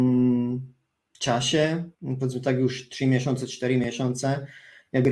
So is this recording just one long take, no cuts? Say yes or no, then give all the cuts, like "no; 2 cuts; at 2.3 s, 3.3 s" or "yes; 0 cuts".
no; 1 cut; at 1.9 s